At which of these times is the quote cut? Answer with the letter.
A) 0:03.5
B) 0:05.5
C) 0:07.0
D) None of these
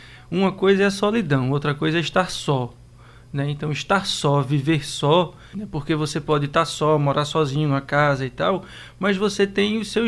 B